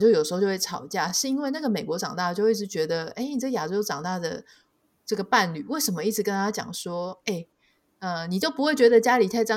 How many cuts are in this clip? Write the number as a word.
zero